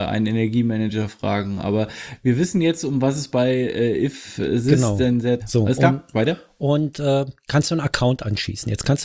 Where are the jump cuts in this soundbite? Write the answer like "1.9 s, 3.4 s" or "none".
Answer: 5.4 s